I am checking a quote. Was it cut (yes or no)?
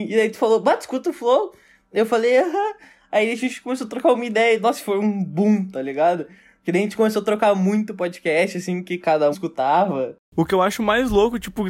yes